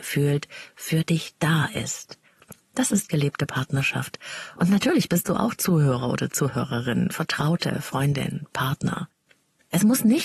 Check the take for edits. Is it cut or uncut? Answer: cut